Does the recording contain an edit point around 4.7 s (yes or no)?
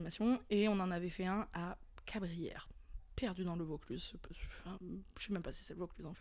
yes